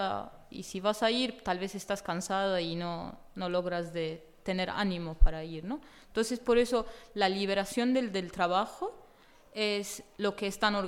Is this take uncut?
yes; 0 cuts

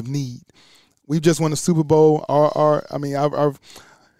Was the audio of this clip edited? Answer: no; 0 cuts

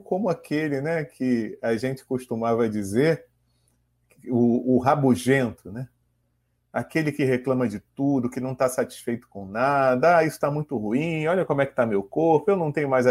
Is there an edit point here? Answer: no; 0 cuts

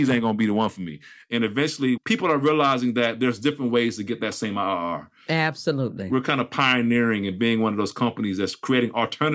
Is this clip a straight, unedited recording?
no; 1 cut; at 2.0 s

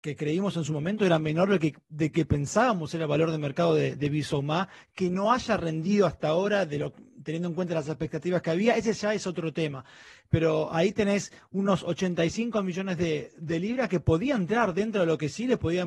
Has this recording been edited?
no; 0 cuts

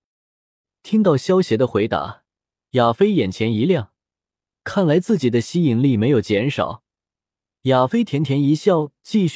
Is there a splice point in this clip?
no; 0 cuts

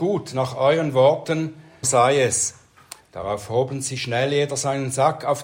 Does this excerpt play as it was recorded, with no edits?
no; 2 cuts; at 1.8 s, 3.0 s

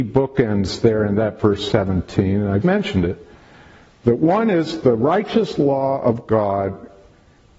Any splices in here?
yes; 1 cut; at 2.6 s

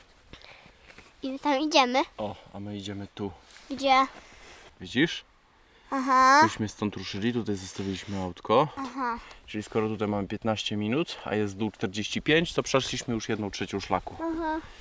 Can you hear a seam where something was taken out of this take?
yes; 2 cuts; at 4.7 s, 8.8 s

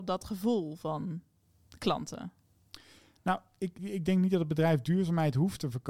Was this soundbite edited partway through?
yes; 1 cut; at 3.8 s

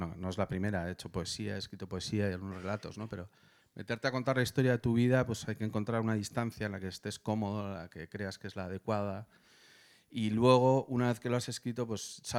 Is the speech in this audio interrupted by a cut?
no; 0 cuts

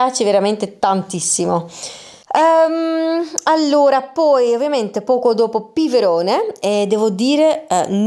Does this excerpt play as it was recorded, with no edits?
no; 1 cut; at 2.2 s

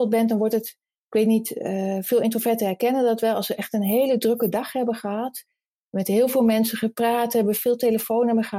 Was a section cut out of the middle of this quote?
no; 0 cuts

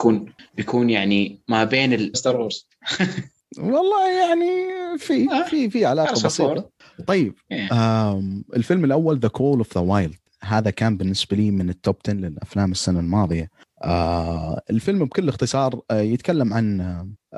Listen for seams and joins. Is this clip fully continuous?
no; 1 cut; at 2.1 s

